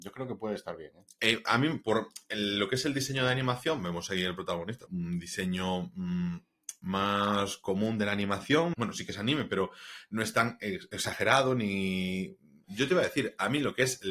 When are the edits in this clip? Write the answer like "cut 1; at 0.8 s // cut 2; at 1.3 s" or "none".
cut 1; at 4.9 s // cut 2; at 8.7 s // cut 3; at 12.6 s